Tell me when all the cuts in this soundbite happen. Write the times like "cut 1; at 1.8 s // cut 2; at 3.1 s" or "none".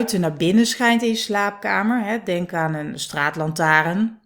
none